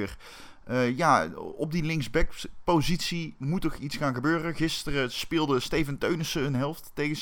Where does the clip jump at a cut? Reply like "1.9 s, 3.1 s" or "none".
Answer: none